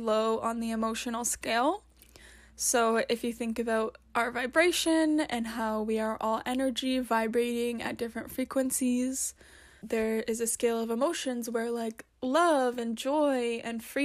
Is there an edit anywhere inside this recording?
yes; 1 cut; at 9.8 s

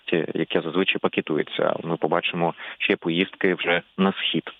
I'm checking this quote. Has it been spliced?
yes; 1 cut; at 1.8 s

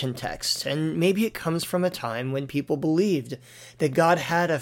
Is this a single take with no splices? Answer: yes; 0 cuts

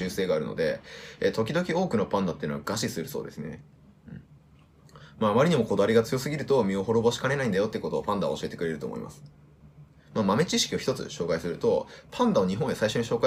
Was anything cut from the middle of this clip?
no; 0 cuts

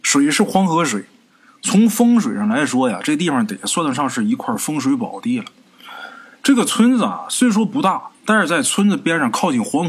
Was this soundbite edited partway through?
no; 0 cuts

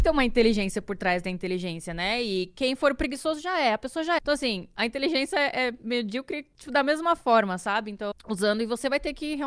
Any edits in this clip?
yes; 2 cuts; at 4.2 s, 8.1 s

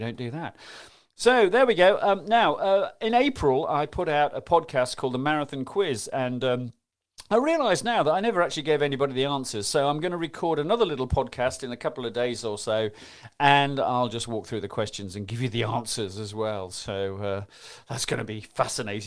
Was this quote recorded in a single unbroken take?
yes; 0 cuts

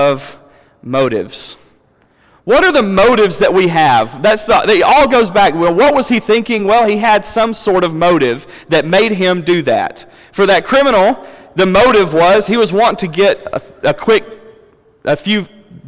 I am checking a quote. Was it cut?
no; 0 cuts

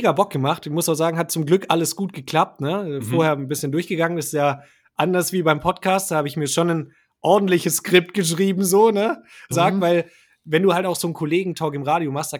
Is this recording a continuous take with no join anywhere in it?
no; 1 cut; at 9.5 s

